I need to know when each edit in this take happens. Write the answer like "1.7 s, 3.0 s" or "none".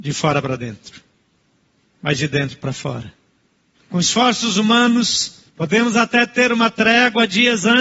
3.7 s, 5.5 s